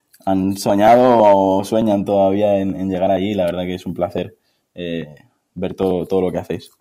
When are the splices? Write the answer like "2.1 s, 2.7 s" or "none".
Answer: none